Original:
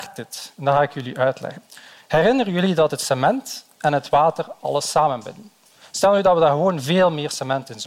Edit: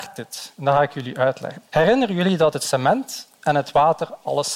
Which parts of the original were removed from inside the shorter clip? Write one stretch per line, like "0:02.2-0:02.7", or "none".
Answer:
0:01.7-0:02.0